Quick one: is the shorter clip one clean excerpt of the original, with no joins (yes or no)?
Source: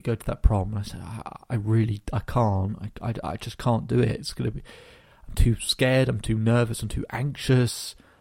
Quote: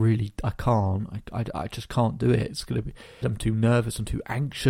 no